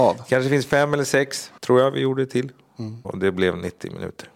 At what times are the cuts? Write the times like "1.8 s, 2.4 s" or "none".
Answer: 1.6 s, 3.0 s